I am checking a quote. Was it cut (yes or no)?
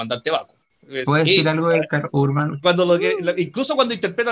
yes